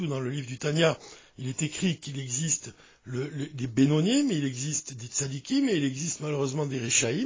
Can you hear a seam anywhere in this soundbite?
no; 0 cuts

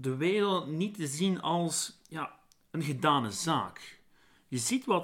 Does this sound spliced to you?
no; 0 cuts

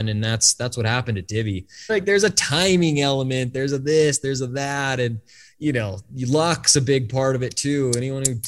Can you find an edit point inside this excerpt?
yes; 1 cut; at 1.9 s

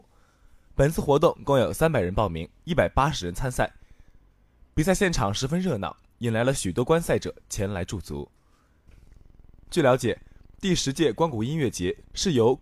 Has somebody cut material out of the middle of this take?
no; 0 cuts

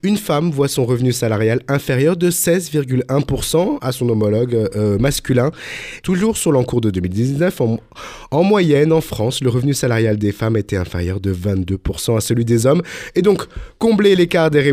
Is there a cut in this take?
yes; 1 cut; at 6.0 s

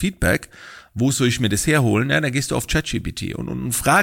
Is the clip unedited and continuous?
yes; 0 cuts

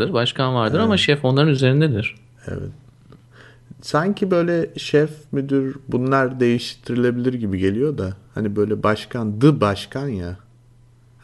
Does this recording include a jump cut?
no; 0 cuts

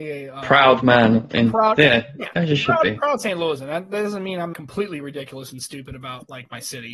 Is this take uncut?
no; 2 cuts; at 2.3 s, 4.5 s

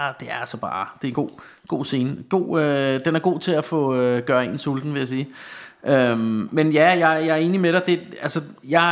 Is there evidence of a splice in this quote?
no; 0 cuts

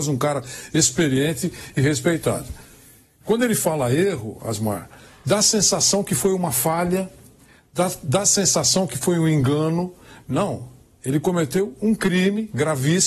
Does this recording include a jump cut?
no; 0 cuts

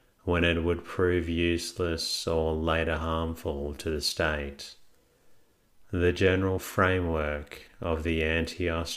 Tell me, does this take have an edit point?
no; 0 cuts

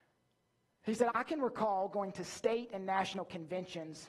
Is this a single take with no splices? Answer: no; 1 cut; at 1.1 s

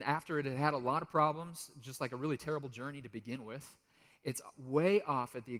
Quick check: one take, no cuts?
yes; 0 cuts

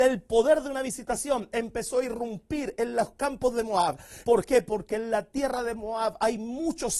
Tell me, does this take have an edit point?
yes; 1 cut; at 4.2 s

